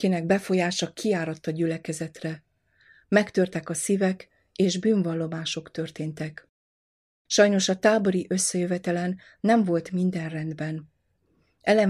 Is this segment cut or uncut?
uncut